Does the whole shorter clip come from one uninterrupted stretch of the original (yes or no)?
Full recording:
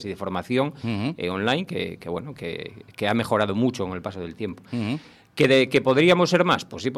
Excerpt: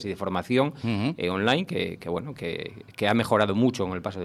yes